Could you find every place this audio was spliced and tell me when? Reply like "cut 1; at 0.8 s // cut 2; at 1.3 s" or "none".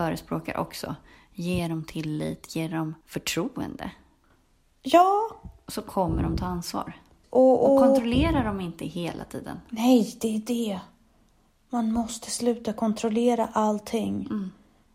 cut 1; at 3.0 s // cut 2; at 7.2 s